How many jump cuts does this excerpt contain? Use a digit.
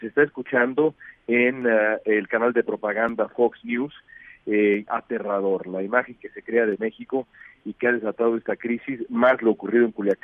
1